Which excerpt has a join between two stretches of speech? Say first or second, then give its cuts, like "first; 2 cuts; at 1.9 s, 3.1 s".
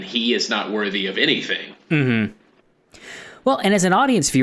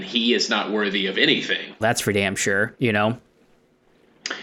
second; 1 cut; at 1.8 s